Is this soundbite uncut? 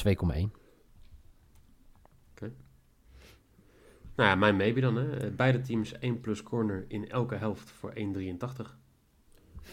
yes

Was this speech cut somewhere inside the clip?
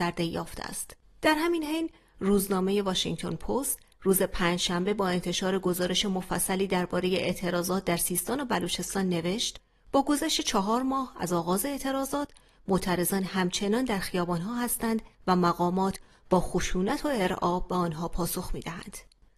yes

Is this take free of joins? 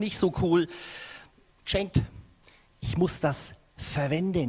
yes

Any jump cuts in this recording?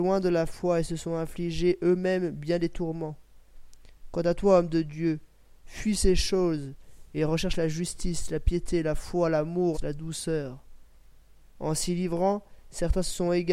yes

